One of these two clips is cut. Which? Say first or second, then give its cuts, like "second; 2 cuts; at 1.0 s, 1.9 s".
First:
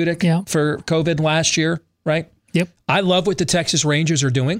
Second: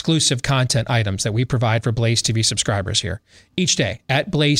first; 1 cut; at 2.8 s